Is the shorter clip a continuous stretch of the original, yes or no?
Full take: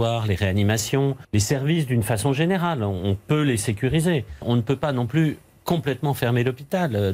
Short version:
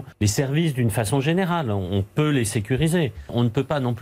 yes